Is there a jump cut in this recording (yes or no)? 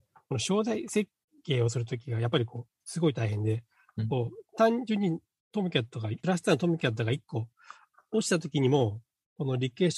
yes